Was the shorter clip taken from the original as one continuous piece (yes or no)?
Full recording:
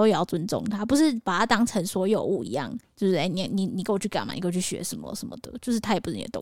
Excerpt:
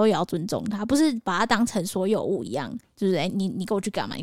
no